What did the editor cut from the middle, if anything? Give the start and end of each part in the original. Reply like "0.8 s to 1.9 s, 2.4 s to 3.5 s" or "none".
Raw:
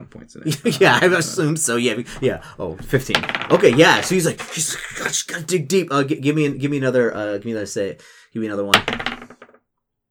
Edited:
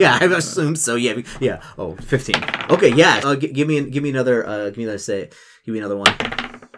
4.0 s to 5.9 s